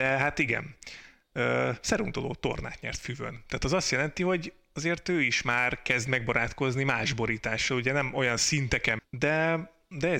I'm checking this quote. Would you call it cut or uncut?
cut